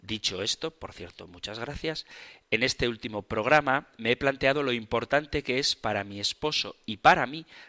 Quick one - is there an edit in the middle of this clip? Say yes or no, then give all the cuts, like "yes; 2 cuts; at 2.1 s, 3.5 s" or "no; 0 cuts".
no; 0 cuts